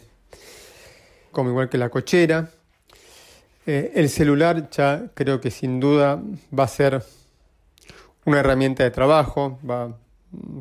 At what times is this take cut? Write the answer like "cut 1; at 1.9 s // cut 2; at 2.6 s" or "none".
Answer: cut 1; at 1.3 s